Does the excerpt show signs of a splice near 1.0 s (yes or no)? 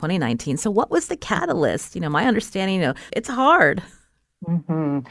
no